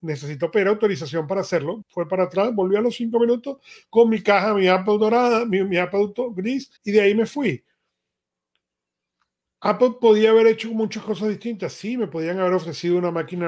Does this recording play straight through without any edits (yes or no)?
no